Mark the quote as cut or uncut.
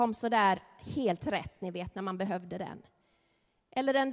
uncut